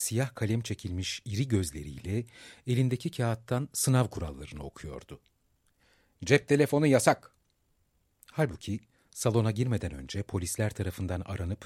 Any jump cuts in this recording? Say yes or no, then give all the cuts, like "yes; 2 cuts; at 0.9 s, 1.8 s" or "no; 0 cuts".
no; 0 cuts